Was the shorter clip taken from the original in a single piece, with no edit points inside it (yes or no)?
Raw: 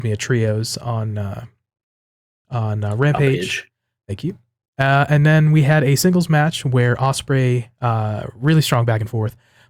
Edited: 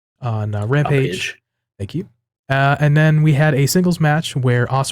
yes